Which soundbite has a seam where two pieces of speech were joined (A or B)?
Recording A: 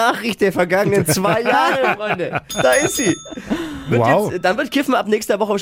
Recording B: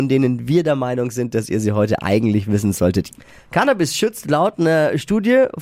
B